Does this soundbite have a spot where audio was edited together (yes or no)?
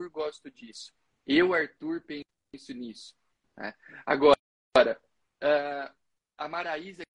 no